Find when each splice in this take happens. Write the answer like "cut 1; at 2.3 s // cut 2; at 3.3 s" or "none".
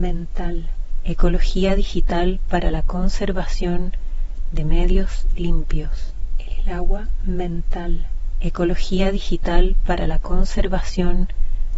cut 1; at 6.5 s